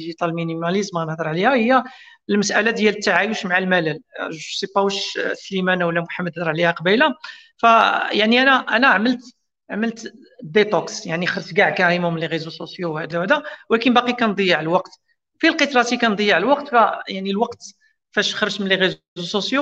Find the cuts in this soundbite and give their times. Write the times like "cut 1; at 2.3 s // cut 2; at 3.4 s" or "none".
cut 1; at 13.1 s